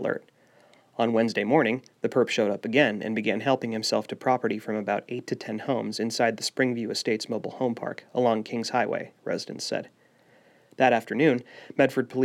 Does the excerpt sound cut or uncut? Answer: uncut